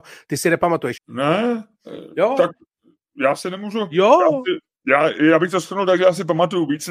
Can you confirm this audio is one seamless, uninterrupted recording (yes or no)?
no